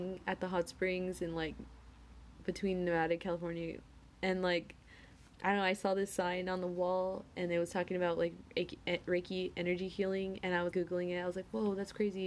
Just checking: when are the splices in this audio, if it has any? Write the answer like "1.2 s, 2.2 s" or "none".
10.7 s